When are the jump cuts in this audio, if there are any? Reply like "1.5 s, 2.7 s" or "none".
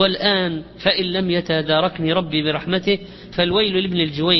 3.3 s